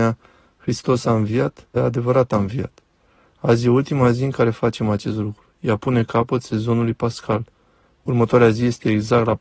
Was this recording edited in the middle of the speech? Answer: yes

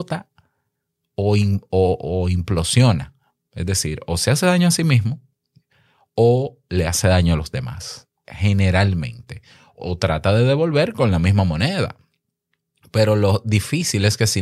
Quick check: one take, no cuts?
yes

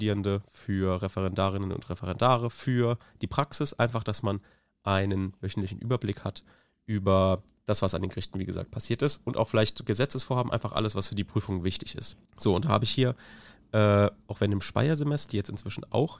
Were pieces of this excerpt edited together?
yes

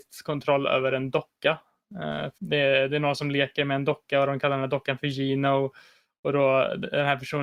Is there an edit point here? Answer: yes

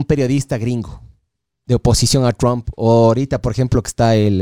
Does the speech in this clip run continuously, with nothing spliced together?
yes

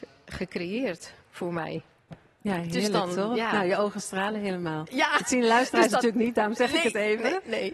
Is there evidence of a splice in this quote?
no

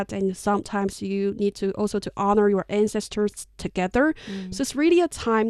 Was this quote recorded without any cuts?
yes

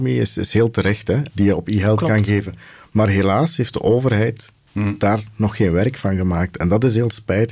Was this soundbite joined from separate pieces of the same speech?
yes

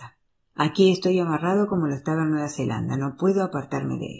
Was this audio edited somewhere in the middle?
no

